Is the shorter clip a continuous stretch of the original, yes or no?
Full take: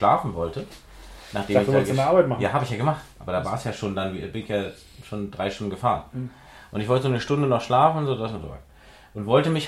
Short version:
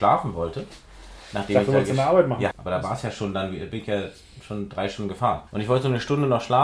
no